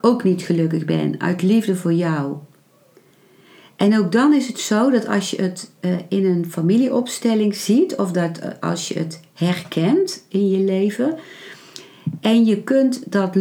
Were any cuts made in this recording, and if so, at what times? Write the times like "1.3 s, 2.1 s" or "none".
none